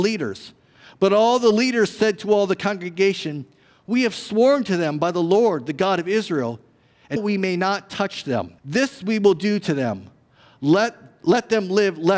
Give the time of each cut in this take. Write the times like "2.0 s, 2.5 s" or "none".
7.2 s, 8.6 s